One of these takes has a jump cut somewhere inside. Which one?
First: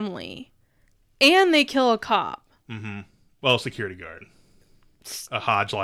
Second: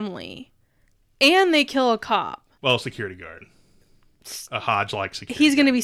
second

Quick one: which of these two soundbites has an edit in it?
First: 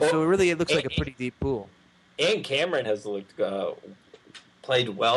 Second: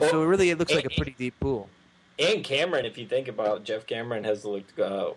first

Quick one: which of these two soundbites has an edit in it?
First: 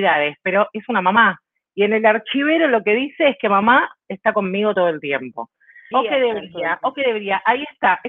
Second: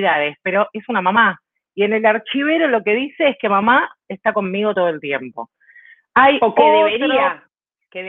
first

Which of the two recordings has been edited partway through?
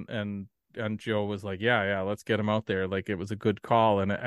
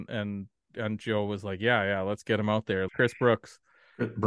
second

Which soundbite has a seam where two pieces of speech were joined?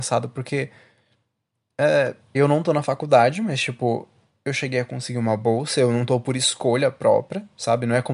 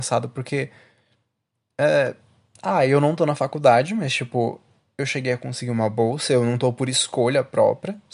first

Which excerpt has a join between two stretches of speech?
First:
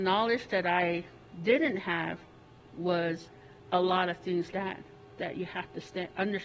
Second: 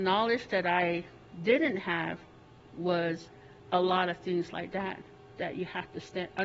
first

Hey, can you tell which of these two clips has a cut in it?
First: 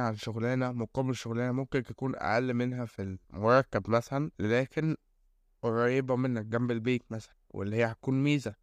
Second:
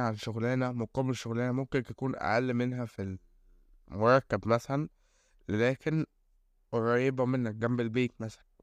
first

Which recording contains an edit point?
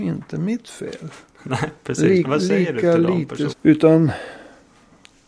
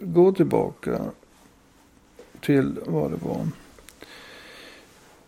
first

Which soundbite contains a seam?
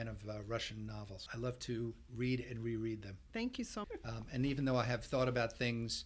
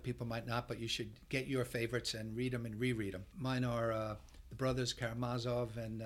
first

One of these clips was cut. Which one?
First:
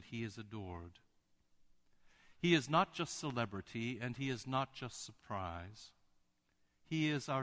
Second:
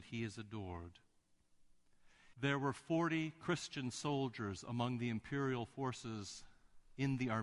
second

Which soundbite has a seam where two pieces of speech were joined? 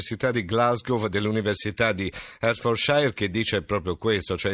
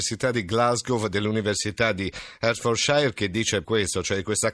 second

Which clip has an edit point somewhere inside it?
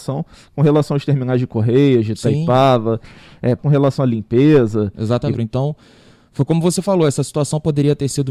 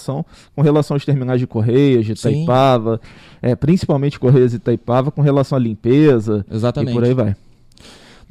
first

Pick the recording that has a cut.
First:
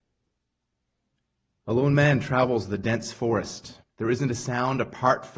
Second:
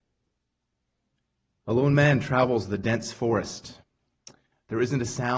first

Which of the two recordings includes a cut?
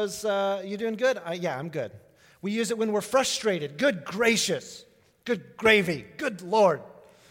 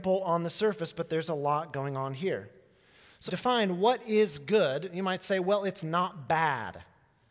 second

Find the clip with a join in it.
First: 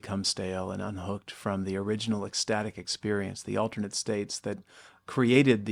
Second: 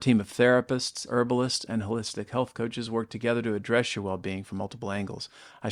second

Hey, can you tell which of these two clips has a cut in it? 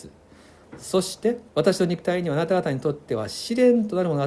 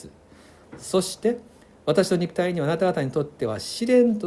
first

